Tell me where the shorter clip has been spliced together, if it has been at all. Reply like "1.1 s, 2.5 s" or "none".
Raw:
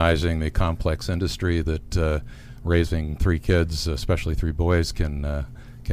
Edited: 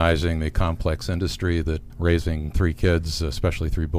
1.9 s